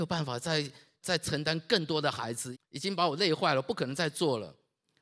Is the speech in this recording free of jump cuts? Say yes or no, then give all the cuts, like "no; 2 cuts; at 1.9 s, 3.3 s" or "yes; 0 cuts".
no; 2 cuts; at 1.0 s, 2.5 s